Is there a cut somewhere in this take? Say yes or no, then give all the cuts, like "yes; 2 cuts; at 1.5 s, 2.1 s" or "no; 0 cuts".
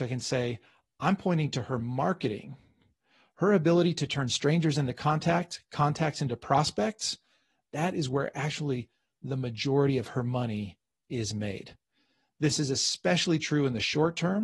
no; 0 cuts